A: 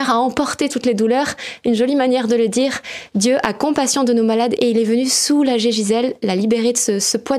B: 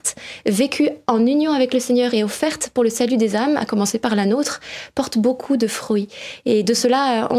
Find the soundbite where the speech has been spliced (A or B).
A